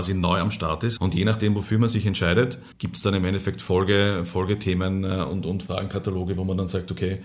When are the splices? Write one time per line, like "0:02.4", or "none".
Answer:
0:01.0
0:02.7